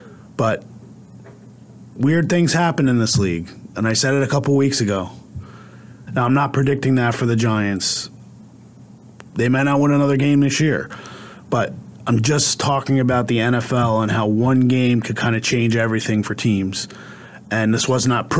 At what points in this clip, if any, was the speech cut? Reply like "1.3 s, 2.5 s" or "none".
6.1 s